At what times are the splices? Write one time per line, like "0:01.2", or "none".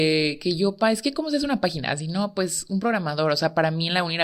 none